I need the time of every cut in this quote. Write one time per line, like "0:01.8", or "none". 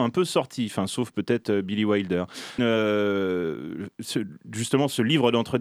0:02.6